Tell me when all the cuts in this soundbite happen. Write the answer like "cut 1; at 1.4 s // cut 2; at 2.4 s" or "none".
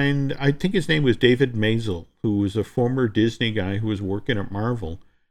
none